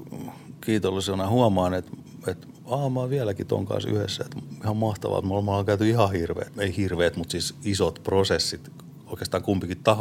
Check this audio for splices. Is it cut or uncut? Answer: cut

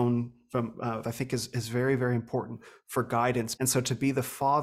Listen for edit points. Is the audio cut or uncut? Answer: cut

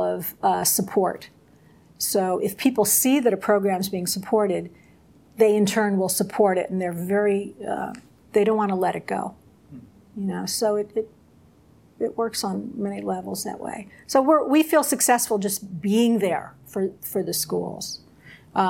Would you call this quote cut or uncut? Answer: uncut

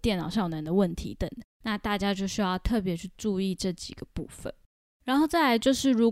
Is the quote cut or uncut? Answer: cut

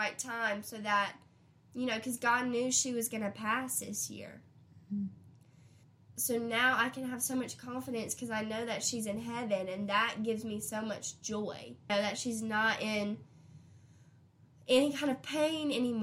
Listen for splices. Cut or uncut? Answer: cut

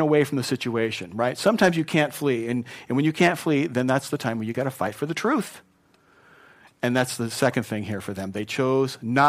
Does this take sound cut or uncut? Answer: uncut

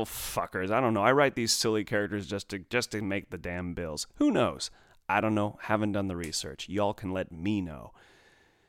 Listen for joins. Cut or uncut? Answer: uncut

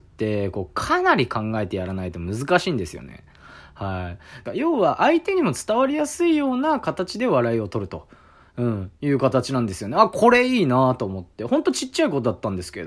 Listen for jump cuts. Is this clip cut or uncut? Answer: cut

